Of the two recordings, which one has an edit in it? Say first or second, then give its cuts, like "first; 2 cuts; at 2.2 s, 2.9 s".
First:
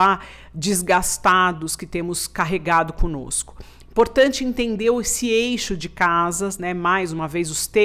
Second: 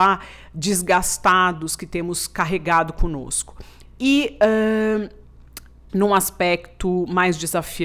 second; 2 cuts; at 3.8 s, 5.9 s